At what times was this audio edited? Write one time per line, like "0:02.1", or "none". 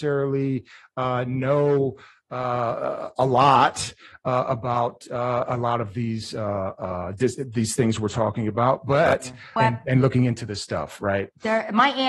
0:09.6